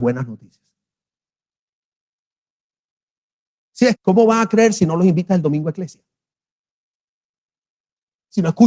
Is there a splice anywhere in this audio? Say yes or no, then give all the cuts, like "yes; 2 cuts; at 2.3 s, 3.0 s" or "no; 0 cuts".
yes; 1 cut; at 3.9 s